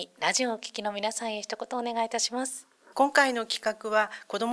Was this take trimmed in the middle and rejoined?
yes; 1 cut; at 2.9 s

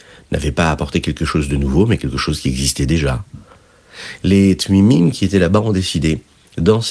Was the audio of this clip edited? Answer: no; 0 cuts

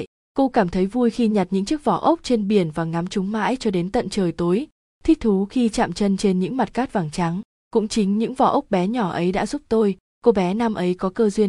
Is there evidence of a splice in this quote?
no; 0 cuts

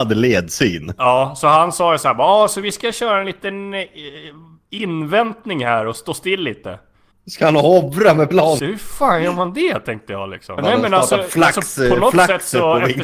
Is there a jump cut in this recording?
yes; 3 cuts; at 7.1 s, 8.6 s, 10.6 s

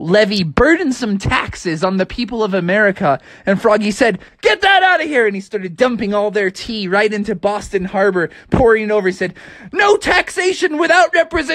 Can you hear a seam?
yes; 1 cut; at 4.3 s

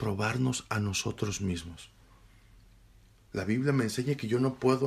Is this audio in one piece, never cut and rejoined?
yes; 0 cuts

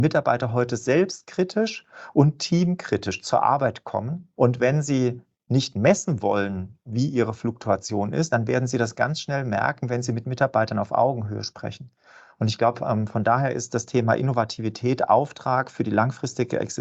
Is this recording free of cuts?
yes; 0 cuts

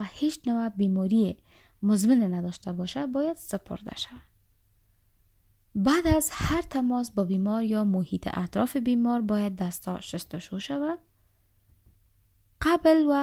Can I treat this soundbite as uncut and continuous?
yes; 0 cuts

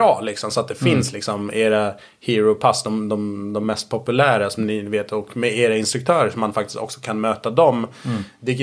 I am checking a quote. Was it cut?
no; 0 cuts

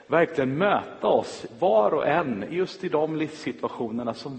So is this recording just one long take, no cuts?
yes; 0 cuts

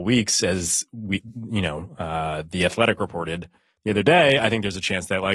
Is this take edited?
no; 0 cuts

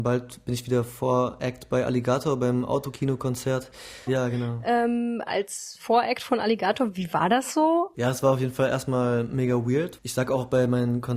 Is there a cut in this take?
yes; 3 cuts; at 4.1 s, 7.9 s, 10.0 s

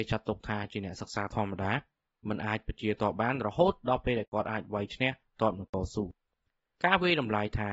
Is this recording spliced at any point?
no; 0 cuts

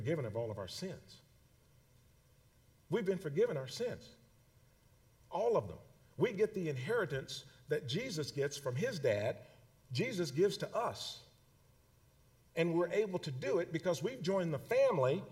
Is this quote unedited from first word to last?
yes; 0 cuts

